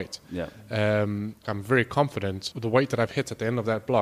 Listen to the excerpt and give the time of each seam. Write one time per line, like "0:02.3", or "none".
0:01.4